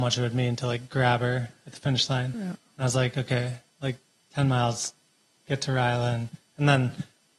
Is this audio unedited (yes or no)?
yes